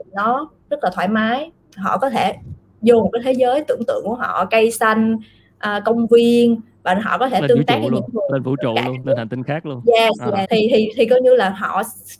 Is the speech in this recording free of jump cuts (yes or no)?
no